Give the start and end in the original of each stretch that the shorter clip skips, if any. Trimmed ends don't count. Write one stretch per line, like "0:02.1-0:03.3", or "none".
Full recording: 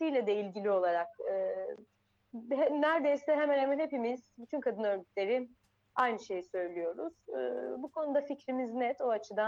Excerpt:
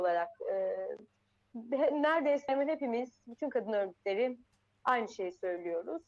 0:03.3-0:03.6